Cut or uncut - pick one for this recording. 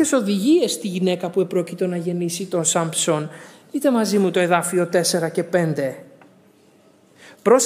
uncut